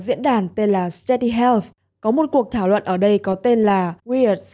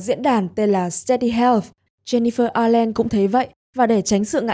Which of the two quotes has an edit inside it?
second; 1 cut; at 1.9 s

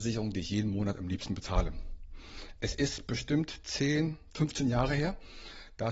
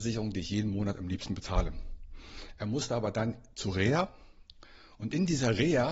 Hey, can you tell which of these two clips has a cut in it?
second; 1 cut; at 2.6 s

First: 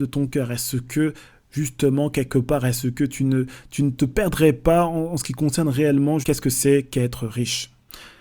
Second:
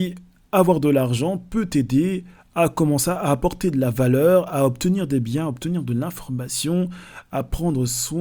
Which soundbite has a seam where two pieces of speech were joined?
first; 1 cut; at 6.2 s

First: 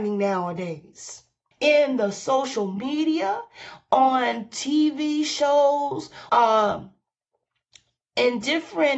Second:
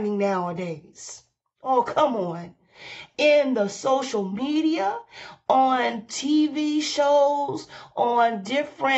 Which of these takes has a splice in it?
first; 2 cuts; at 1.5 s, 6.3 s

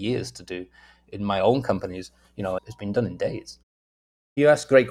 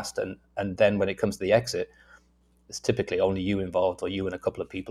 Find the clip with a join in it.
first; 1 cut; at 2.6 s

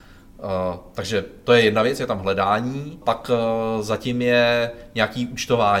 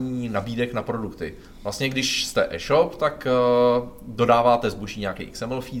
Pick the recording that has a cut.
first; 1 cut; at 3.0 s

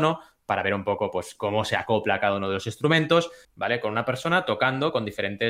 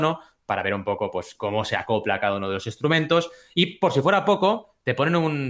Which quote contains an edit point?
first; 1 cut; at 3.4 s

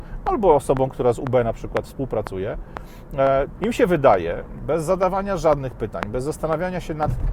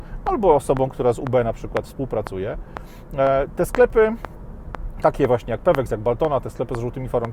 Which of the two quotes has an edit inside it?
first; 2 cuts; at 3.6 s, 4.6 s

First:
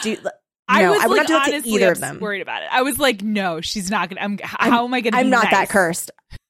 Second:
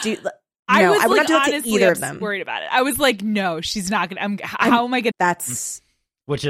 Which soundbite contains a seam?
second; 1 cut; at 5.1 s

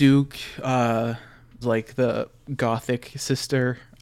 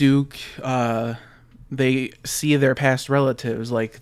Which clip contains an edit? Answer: first; 1 cut; at 1.6 s

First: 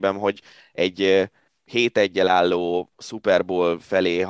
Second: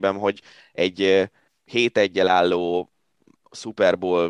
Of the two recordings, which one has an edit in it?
first; 1 cut; at 2.9 s

